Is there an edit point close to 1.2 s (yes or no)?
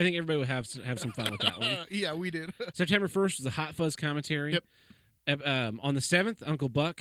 no